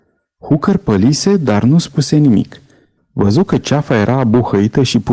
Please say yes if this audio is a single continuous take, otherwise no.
no